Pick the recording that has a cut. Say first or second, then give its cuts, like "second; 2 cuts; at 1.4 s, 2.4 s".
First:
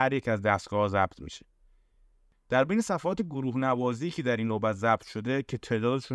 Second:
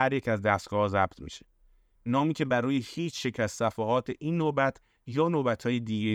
second; 1 cut; at 1.9 s